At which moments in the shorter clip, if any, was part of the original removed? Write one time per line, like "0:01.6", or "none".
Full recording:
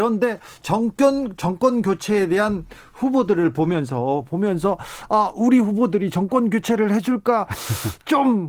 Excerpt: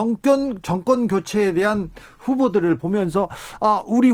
0:02.8